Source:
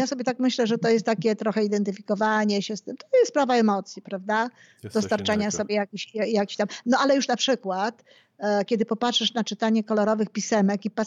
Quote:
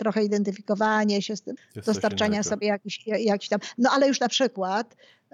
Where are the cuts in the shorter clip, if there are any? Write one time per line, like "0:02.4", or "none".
0:01.6